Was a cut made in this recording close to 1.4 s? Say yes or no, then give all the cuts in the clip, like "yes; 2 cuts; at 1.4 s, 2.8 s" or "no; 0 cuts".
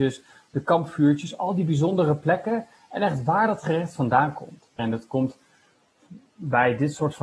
no; 1 cut; at 4.8 s